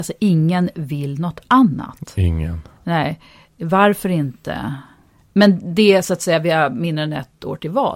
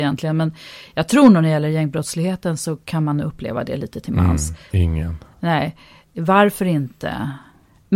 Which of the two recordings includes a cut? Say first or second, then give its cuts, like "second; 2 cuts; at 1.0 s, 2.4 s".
second; 1 cut; at 4.7 s